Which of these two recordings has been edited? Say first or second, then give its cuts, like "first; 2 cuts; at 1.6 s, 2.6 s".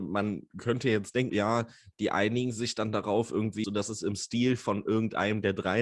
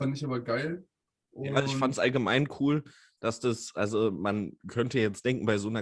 first; 2 cuts; at 1.3 s, 3.6 s